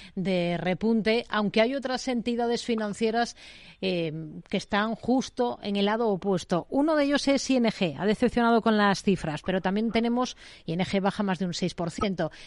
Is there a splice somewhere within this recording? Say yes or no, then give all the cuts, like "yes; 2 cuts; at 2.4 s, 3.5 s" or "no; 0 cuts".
no; 0 cuts